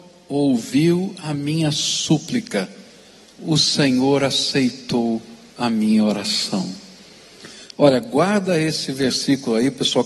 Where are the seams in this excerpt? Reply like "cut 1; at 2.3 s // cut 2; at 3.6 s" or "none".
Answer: none